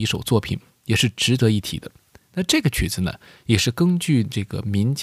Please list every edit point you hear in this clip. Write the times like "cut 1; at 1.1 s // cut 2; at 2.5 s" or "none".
none

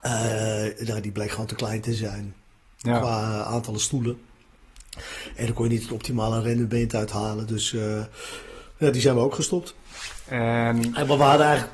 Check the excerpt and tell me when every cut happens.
none

